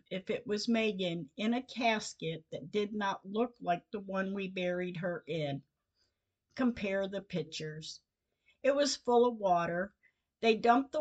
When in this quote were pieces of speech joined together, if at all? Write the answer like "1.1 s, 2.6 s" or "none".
none